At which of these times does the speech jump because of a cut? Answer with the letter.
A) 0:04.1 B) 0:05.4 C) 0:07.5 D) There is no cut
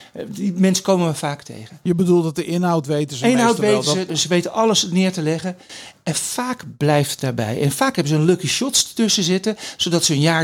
A